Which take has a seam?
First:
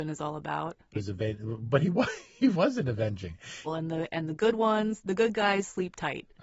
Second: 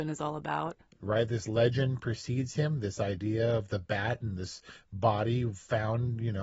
first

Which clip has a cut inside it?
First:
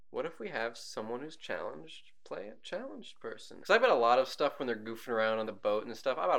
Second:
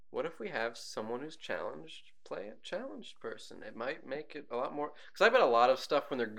first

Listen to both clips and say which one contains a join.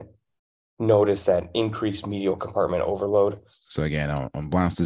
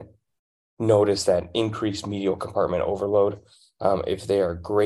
first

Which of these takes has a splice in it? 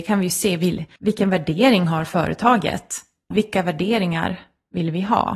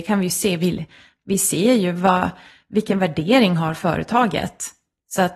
first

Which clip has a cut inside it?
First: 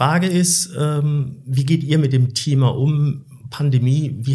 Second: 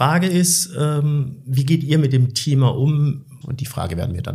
second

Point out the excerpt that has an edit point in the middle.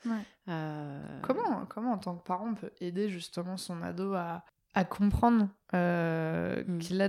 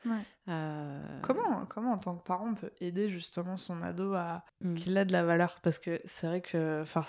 second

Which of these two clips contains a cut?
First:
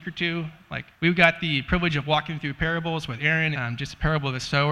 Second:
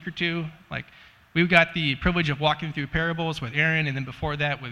first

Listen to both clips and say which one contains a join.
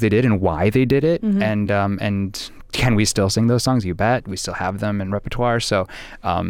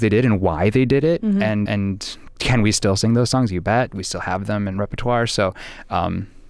second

